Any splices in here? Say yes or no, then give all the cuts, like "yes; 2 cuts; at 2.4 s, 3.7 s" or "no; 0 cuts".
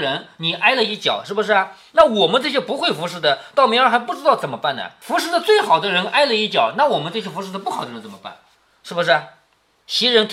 yes; 1 cut; at 5.0 s